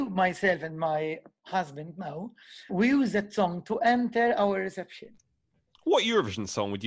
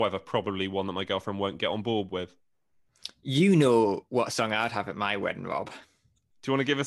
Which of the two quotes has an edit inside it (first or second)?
first